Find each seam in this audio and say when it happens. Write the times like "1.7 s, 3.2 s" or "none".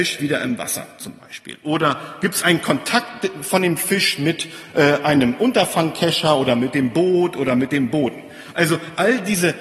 none